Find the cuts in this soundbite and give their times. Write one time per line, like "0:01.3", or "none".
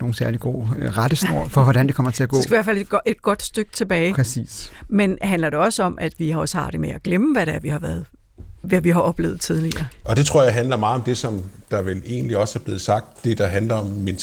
0:10.0
0:13.1